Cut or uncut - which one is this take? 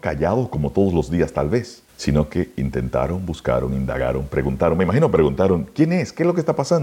cut